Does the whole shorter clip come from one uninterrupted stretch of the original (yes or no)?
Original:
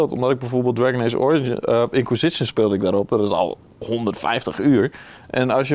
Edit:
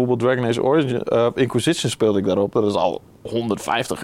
yes